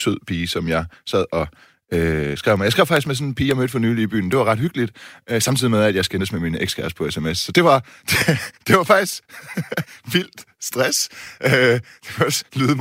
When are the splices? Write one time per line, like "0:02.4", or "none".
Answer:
none

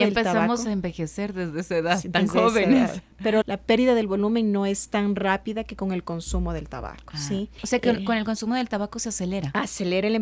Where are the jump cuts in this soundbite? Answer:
0:03.4

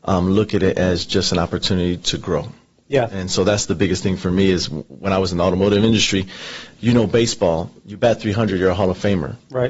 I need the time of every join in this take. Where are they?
none

